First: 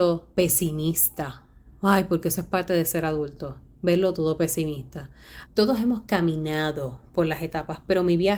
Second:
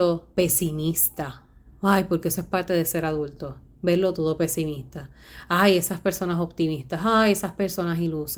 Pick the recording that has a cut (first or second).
first